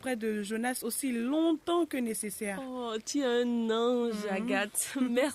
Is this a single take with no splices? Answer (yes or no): yes